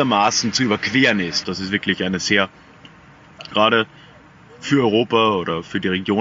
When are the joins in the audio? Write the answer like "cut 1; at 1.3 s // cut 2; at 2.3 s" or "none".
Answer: cut 1; at 1.4 s // cut 2; at 3.5 s